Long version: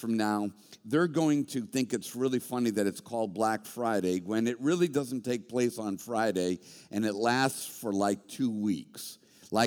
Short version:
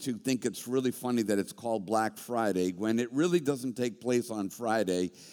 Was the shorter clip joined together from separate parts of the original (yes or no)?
no